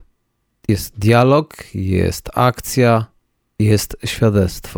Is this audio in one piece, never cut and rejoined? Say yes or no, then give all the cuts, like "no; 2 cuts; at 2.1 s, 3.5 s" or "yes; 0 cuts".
yes; 0 cuts